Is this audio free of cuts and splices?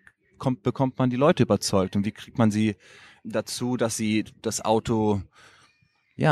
yes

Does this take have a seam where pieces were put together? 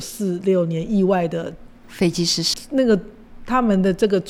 yes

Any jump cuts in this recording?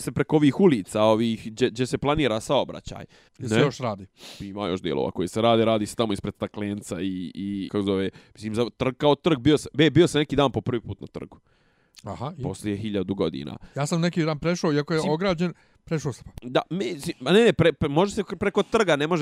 yes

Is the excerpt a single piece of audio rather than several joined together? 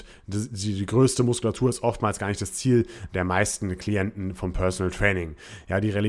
yes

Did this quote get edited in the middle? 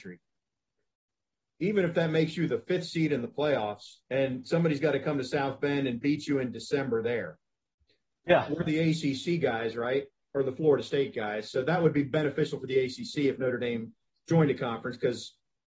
yes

